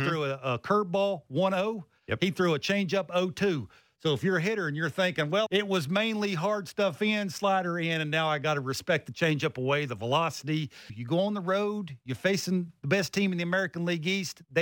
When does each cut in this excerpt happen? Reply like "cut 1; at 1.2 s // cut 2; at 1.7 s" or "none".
cut 1; at 5.5 s // cut 2; at 10.9 s